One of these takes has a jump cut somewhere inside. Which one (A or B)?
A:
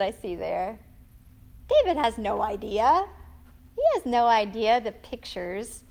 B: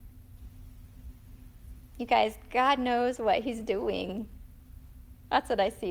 A